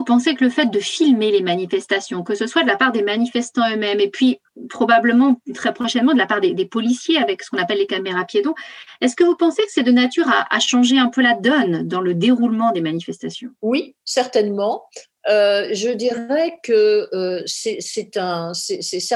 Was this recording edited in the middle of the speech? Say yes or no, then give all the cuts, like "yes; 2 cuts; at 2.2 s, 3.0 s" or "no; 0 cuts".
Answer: yes; 1 cut; at 13.5 s